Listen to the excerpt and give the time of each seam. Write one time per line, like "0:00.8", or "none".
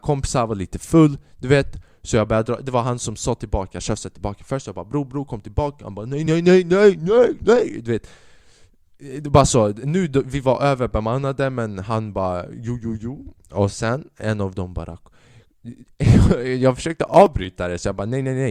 none